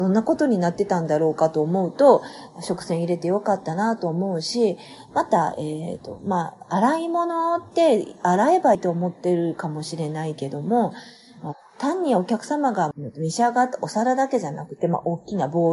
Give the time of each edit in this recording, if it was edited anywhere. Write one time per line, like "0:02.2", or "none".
0:08.7
0:12.9